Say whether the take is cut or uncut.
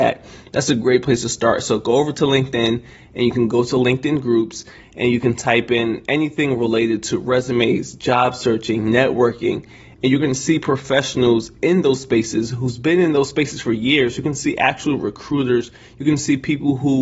uncut